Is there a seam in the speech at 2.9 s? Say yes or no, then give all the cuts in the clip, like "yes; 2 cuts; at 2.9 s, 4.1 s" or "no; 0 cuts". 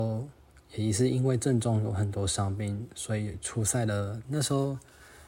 no; 1 cut; at 4.2 s